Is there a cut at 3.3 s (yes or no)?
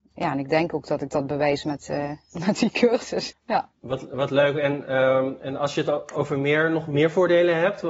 yes